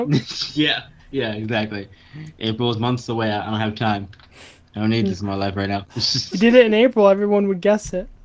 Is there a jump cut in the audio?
no; 0 cuts

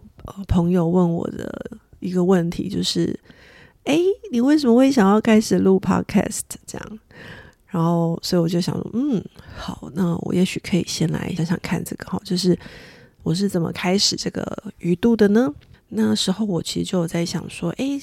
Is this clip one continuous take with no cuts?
no; 2 cuts; at 11.4 s, 15.7 s

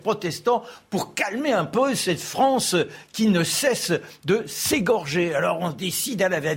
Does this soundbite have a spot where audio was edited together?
no; 0 cuts

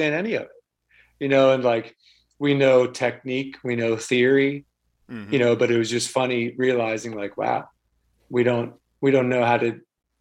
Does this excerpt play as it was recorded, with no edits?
yes; 0 cuts

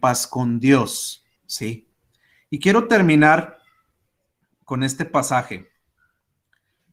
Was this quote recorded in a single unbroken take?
no; 1 cut; at 1.4 s

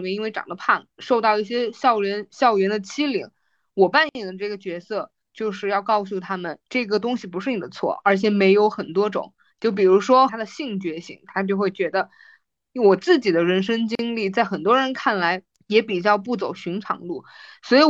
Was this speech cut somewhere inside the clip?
yes; 2 cuts; at 10.3 s, 12.7 s

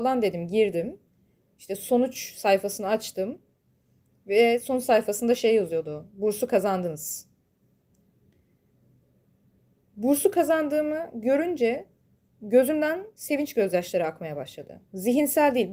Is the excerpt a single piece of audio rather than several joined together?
yes; 0 cuts

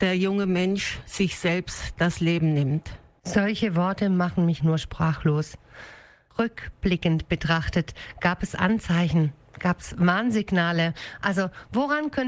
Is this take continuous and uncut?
no; 1 cut; at 4.6 s

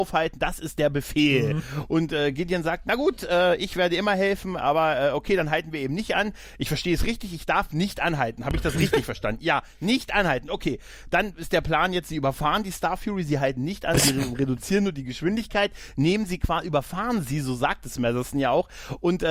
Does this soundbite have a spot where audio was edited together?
no; 0 cuts

